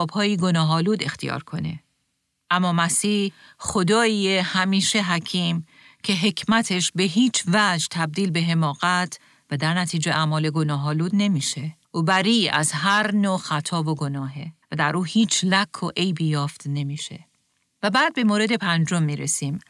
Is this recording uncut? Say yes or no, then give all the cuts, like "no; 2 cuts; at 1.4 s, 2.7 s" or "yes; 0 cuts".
no; 2 cuts; at 11.8 s, 14.6 s